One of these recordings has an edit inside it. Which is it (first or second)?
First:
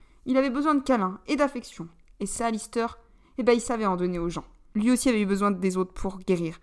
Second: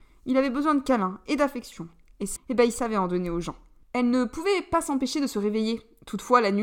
second